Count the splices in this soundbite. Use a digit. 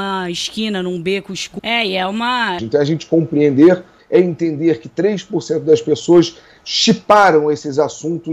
3